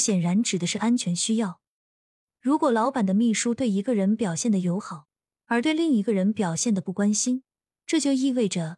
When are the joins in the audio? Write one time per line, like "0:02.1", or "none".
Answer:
0:02.3